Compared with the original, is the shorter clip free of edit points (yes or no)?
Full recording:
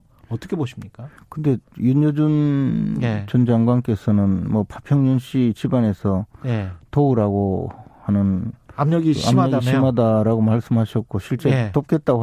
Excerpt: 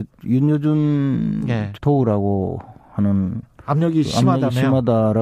no